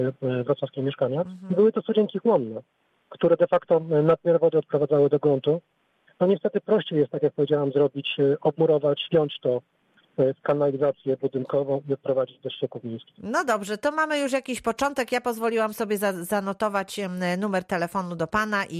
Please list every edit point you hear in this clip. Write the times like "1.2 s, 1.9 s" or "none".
1.2 s, 9.1 s